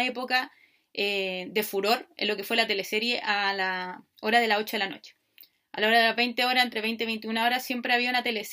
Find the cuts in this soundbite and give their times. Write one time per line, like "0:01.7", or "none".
none

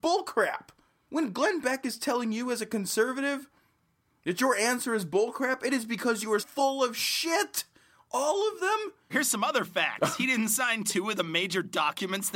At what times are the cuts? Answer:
0:01.1
0:06.4
0:09.1

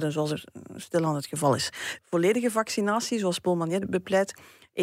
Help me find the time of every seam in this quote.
0:02.0

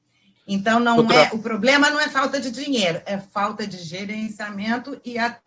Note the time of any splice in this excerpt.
none

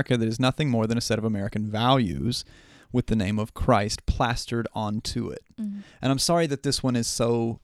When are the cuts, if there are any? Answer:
none

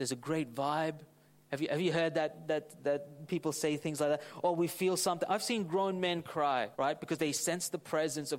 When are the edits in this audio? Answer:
0:06.7

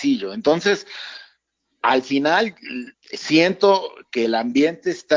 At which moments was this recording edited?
0:02.9

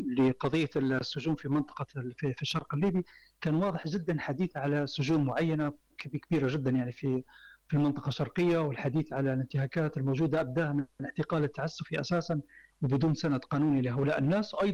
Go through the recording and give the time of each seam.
none

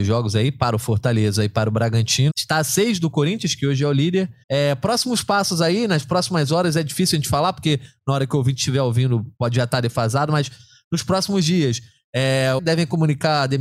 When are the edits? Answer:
0:02.3
0:04.4
0:12.6

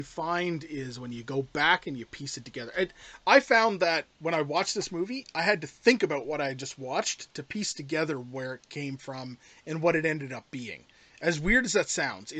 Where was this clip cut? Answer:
none

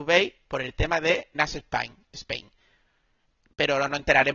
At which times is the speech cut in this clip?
0:01.3

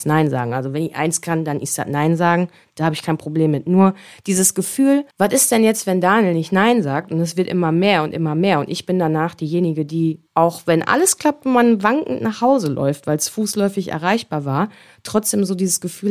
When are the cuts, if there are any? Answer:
0:10.3

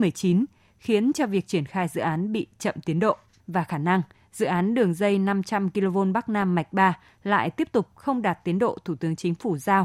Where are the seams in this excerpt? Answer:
0:03.4

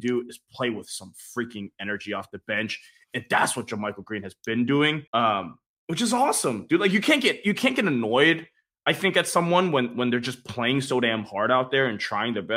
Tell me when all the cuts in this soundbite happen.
0:05.1

